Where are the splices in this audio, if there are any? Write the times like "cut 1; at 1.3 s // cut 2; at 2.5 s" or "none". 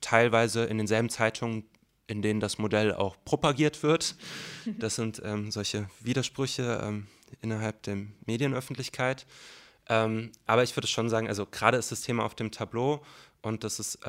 none